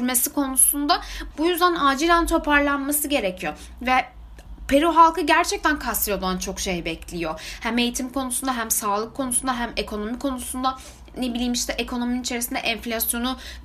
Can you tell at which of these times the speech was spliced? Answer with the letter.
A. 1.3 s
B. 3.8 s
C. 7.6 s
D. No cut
A